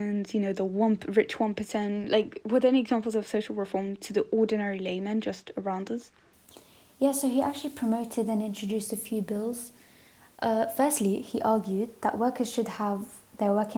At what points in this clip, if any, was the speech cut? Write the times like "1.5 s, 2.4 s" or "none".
none